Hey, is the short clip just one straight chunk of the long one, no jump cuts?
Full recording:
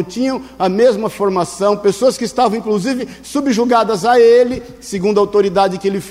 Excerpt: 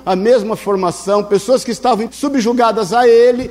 no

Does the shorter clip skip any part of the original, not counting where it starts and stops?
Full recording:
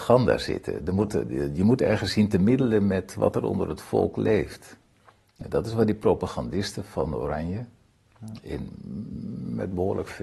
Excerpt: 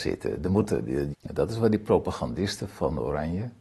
yes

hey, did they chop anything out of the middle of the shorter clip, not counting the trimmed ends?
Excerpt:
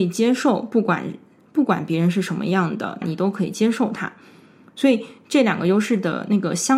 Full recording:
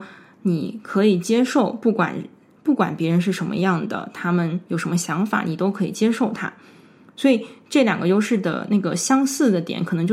yes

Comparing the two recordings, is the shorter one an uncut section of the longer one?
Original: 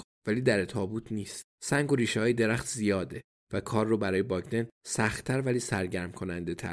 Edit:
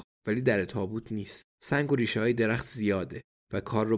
yes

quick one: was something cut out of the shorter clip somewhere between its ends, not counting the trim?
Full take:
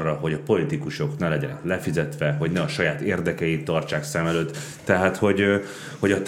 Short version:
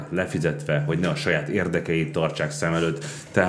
no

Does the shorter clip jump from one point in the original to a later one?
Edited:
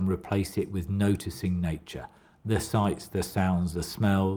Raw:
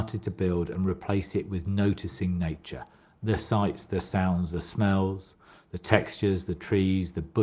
no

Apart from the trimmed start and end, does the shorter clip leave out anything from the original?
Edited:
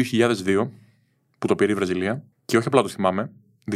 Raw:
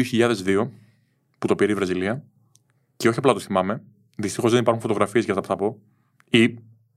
yes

